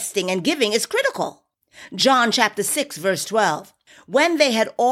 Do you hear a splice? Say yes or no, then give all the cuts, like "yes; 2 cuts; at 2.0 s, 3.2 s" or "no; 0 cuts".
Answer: no; 0 cuts